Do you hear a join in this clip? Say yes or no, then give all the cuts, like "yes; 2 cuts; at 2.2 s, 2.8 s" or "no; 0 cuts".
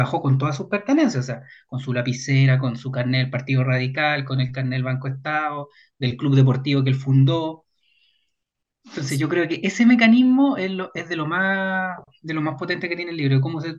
no; 0 cuts